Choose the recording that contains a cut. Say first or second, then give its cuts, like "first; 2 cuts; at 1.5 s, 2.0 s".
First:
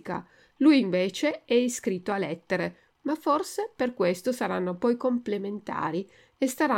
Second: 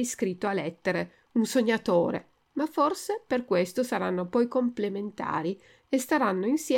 first; 1 cut; at 2.9 s